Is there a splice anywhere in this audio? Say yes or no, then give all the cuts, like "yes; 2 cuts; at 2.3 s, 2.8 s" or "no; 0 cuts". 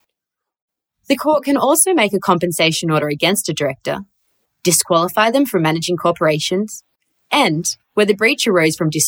no; 0 cuts